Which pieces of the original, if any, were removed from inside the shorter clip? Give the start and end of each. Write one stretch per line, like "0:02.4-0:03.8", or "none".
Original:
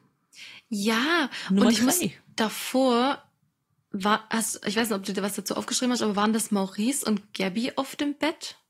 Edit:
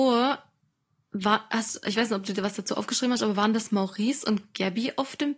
none